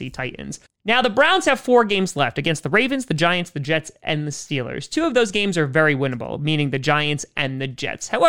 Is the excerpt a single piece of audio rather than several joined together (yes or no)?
yes